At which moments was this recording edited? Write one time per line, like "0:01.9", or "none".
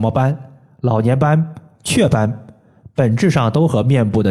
0:01.7